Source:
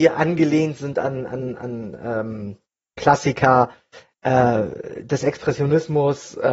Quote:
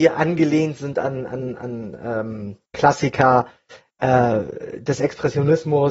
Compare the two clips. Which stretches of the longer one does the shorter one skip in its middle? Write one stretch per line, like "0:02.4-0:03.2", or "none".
0:02.7-0:02.9